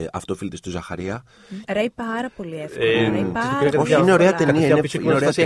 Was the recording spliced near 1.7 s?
yes; 1 cut; at 1.7 s

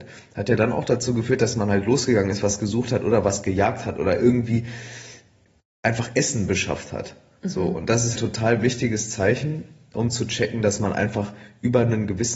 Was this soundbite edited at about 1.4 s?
no; 1 cut; at 8.2 s

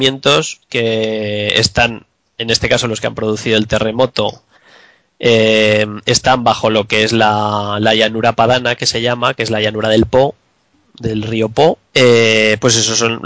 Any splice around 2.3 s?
no; 1 cut; at 11.9 s

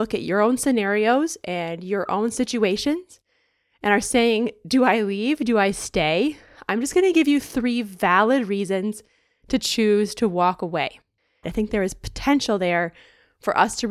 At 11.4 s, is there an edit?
yes; 1 cut; at 11.4 s

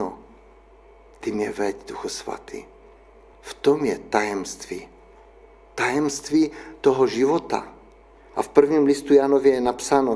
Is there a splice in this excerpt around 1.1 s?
no; 2 cuts; at 3.3 s, 8.3 s

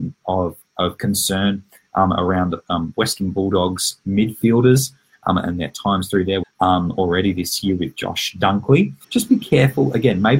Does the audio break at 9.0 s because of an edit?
yes; 2 cuts; at 6.4 s, 9.0 s

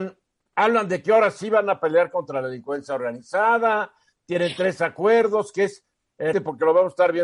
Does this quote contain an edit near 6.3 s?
yes; 1 cut; at 6.3 s

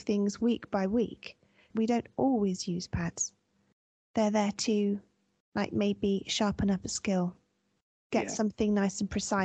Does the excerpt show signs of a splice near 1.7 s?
yes; 1 cut; at 1.7 s

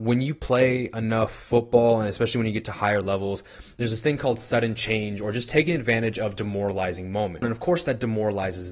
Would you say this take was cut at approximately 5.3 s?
no; 1 cut; at 7.4 s

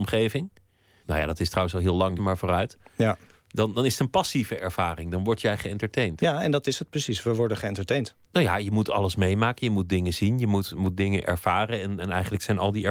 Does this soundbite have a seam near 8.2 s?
yes; 3 cuts; at 1.0 s, 2.2 s, 8.2 s

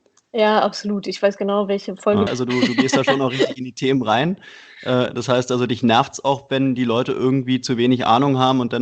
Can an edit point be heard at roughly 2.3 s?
yes; 1 cut; at 2.3 s

